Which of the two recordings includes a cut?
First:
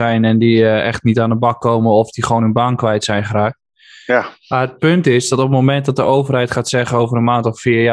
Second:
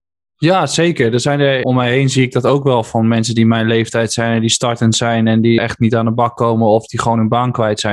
second; 2 cuts; at 1.6 s, 5.6 s

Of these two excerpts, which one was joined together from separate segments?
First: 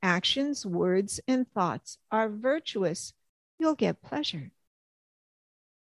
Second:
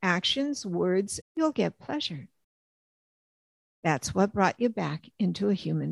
second; 2 cuts; at 1.2 s, 3.7 s

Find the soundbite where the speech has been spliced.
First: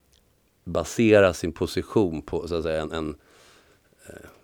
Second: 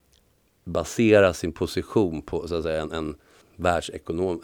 second; 1 cut; at 3.4 s

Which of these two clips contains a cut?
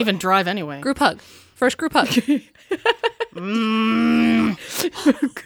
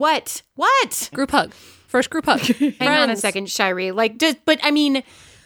second; 2 cuts; at 1.1 s, 2.8 s

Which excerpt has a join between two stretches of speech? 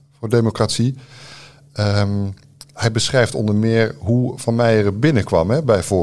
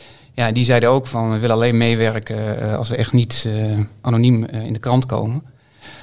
second; 1 cut; at 4.0 s

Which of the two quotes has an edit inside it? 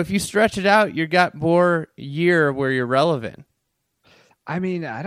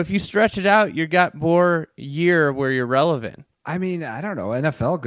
second; 1 cut; at 3.5 s

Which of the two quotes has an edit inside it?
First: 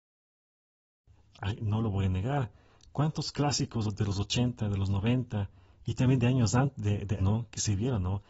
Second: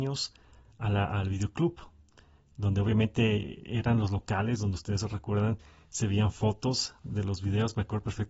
first; 2 cuts; at 1.3 s, 7.2 s

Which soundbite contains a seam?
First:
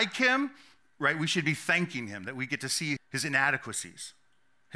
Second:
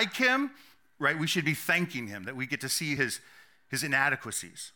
first; 1 cut; at 3.0 s

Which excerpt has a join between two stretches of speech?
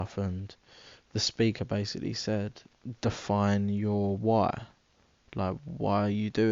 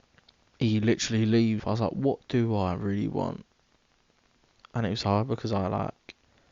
second; 1 cut; at 1.6 s

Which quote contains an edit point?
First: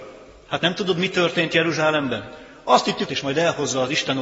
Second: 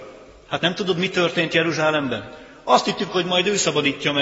first; 1 cut; at 3.1 s

